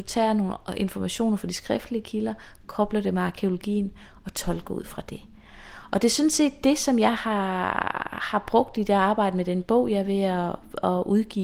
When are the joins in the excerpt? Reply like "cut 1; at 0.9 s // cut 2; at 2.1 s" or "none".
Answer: none